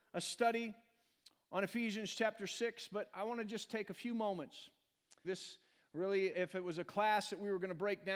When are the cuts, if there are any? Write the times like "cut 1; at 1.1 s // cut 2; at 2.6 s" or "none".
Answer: cut 1; at 5.2 s // cut 2; at 6.3 s